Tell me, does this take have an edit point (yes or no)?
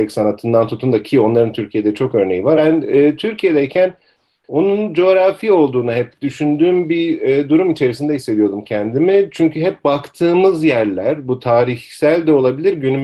yes